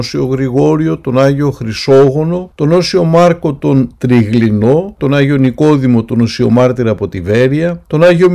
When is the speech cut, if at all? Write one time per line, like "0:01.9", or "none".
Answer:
0:05.0